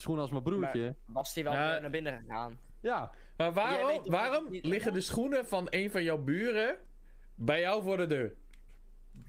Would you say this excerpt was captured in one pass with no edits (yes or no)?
no